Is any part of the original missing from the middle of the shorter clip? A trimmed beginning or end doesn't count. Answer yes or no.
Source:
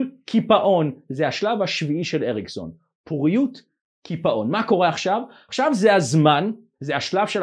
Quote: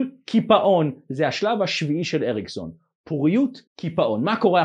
yes